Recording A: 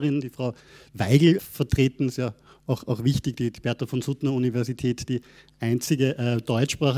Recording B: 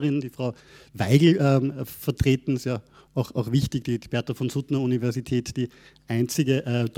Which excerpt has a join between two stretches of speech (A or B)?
A